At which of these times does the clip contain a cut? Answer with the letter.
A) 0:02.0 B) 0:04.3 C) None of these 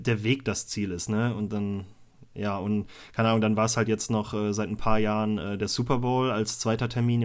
C